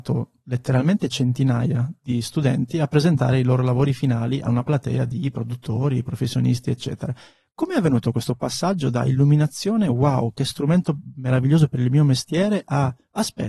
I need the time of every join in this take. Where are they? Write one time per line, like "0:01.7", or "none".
none